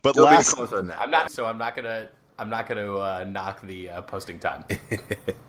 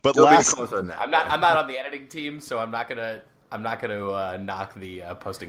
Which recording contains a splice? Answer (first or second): first